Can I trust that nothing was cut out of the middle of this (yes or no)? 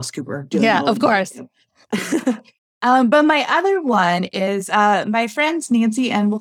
yes